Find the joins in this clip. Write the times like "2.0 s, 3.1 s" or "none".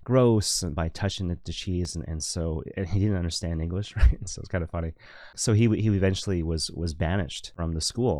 none